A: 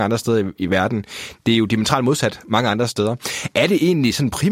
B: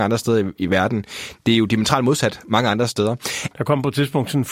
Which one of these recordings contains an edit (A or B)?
B